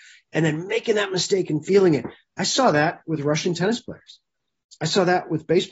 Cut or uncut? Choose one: uncut